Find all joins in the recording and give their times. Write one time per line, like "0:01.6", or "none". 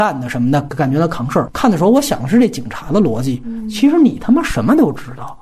0:01.5

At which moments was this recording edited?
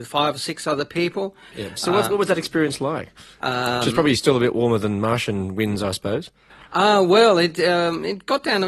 0:01.5
0:03.4

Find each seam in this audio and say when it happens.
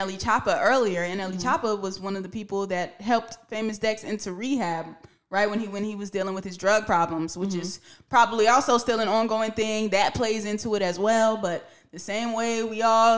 none

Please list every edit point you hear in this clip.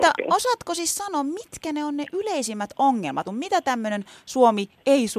0:03.3

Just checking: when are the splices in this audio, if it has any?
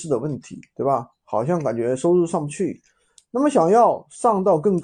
none

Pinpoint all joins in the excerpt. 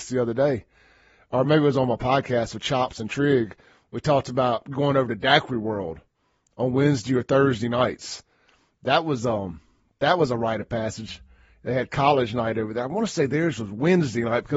none

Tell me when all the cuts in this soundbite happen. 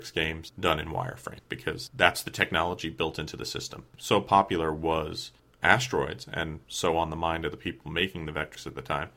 0:03.9

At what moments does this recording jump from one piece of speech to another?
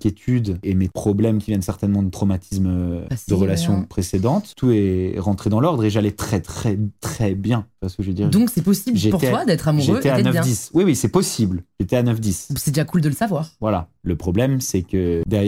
none

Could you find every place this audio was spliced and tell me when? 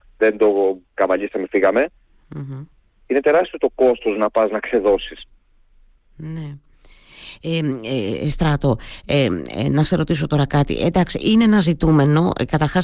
none

